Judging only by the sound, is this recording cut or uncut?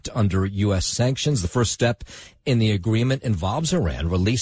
uncut